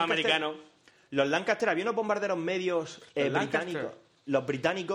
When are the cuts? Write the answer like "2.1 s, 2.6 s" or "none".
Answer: none